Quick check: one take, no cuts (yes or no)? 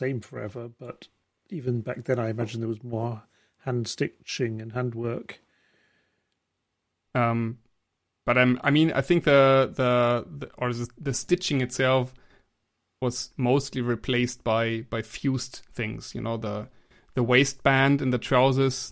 no